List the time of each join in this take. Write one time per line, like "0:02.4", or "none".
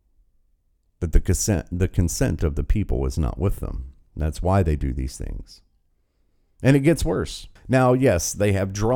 0:07.6